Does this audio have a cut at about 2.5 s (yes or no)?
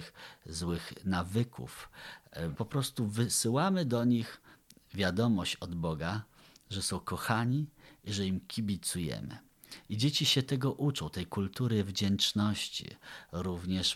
yes